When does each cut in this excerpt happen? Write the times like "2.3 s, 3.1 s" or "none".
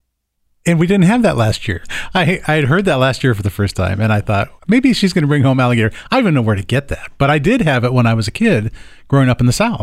1.8 s, 4.6 s